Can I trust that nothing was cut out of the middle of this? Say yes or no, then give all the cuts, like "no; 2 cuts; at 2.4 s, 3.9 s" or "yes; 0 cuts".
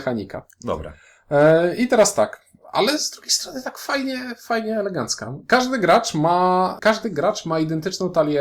no; 1 cut; at 6.8 s